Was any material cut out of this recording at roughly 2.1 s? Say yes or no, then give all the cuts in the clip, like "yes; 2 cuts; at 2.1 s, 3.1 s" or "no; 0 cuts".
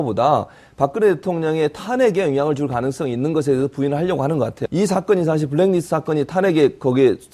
no; 1 cut; at 4.7 s